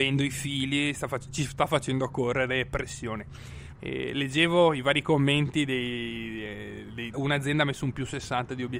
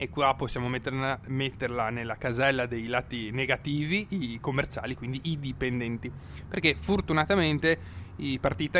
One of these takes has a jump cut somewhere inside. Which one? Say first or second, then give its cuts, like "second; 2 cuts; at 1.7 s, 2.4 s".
first; 2 cuts; at 3.7 s, 7.1 s